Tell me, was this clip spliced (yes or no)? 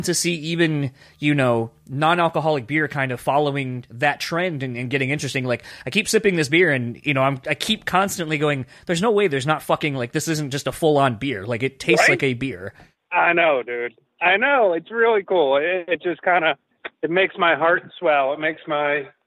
no